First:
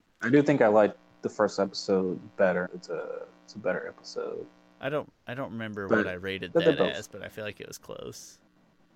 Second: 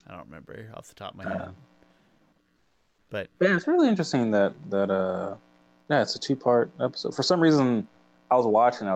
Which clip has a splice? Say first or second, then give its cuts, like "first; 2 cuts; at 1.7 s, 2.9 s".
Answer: first; 1 cut; at 2.7 s